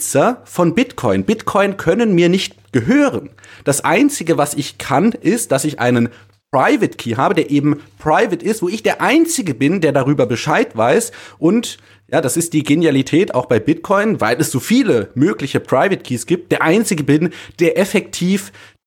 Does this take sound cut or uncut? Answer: uncut